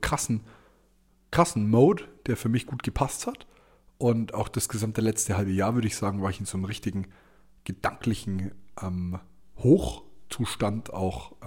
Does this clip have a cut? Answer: no; 0 cuts

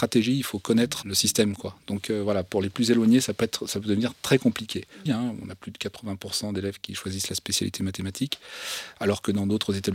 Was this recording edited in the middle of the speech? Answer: yes; 2 cuts; at 1.0 s, 5.1 s

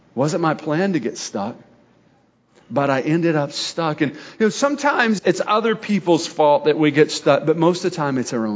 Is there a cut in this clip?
yes; 1 cut; at 5.2 s

